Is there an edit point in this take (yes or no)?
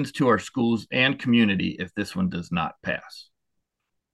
no